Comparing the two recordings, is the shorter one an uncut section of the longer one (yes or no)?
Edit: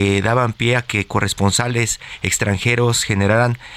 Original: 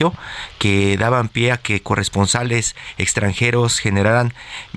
yes